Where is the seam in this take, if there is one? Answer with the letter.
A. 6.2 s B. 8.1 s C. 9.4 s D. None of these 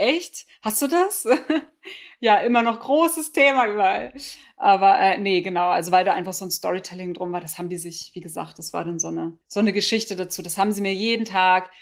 C